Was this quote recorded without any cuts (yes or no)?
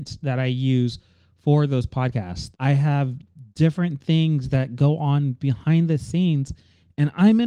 no